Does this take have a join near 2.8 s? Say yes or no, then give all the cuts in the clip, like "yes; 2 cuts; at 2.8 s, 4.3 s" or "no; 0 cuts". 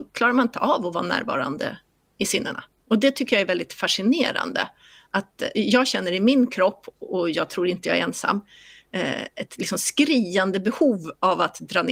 yes; 2 cuts; at 2.8 s, 5.5 s